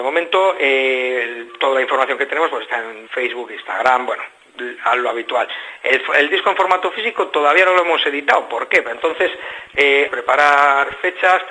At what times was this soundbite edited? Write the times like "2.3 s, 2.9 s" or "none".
3.1 s, 8.8 s, 10.1 s